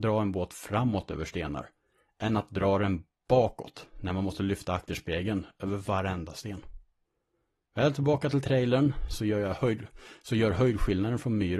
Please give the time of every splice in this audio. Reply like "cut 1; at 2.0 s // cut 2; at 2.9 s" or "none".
none